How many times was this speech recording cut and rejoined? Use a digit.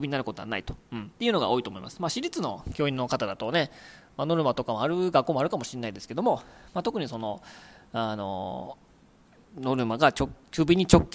1